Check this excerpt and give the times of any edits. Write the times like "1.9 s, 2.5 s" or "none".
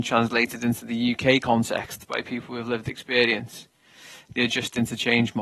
none